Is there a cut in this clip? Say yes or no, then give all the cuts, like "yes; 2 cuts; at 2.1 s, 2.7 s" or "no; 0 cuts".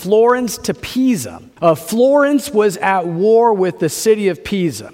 yes; 1 cut; at 1.6 s